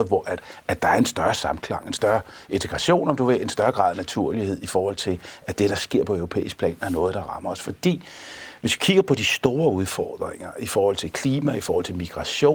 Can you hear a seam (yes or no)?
no